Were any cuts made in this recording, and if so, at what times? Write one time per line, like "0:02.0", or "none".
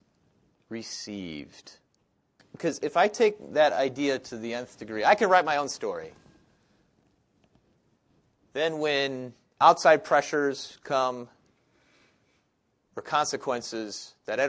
0:02.4